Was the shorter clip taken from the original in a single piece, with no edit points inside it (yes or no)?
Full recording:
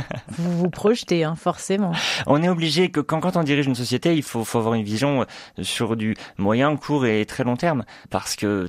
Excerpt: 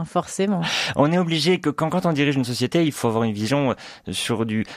no